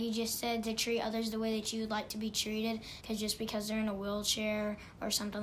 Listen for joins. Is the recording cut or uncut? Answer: cut